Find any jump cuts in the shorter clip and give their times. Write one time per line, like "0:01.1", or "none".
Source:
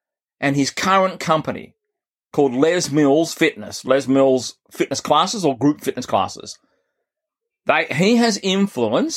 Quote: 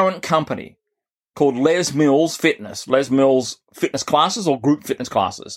none